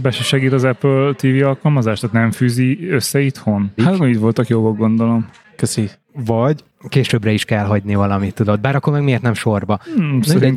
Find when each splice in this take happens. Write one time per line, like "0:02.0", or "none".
0:03.8